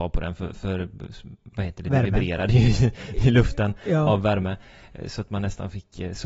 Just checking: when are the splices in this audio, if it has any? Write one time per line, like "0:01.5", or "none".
none